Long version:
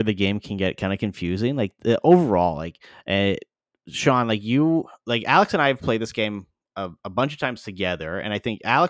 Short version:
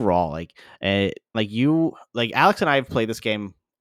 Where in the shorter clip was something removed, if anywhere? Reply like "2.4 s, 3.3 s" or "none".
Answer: 1.3 s